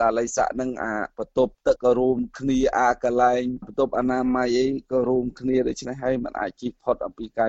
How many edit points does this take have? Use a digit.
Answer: 1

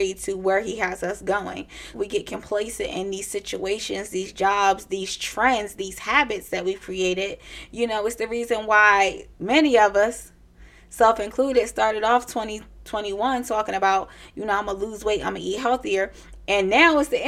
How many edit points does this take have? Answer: 1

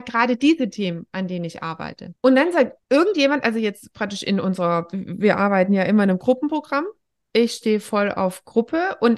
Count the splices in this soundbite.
1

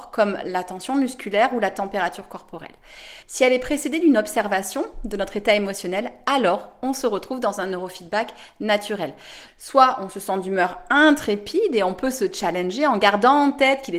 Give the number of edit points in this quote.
2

